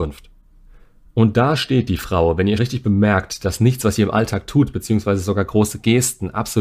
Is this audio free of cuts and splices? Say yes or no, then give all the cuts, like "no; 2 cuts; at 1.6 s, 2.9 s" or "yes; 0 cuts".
no; 1 cut; at 2.6 s